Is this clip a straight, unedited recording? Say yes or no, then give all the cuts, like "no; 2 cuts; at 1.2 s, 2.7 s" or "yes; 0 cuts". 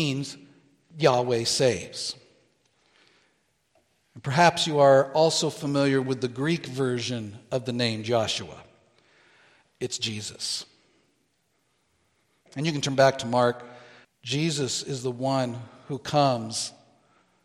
no; 2 cuts; at 12.5 s, 14.0 s